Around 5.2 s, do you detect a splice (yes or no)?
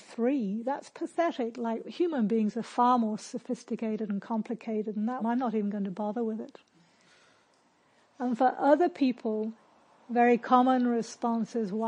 yes